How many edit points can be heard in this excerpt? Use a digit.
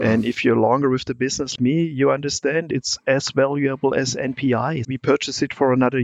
2